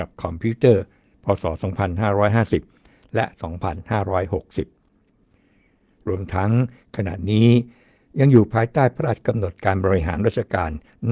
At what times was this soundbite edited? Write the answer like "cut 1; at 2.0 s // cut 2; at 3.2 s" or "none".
none